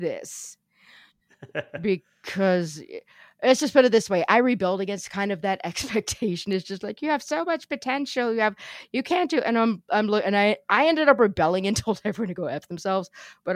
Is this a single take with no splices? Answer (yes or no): yes